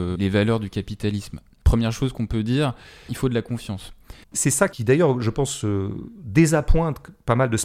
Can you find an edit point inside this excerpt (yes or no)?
yes